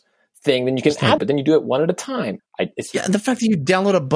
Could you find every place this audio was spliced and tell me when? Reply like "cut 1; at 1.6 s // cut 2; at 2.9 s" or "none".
cut 1; at 1.2 s // cut 2; at 2.4 s